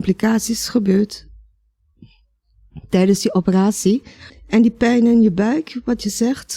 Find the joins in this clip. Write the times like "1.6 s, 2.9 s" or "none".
4.3 s